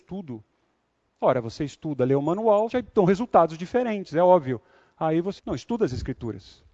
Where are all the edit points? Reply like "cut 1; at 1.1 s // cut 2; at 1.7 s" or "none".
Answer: cut 1; at 2.7 s // cut 2; at 5.4 s